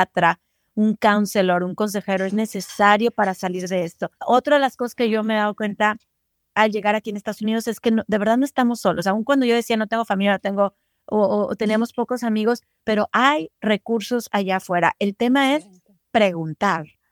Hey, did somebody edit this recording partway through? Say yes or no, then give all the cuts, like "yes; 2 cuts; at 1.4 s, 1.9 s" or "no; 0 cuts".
yes; 1 cut; at 4.2 s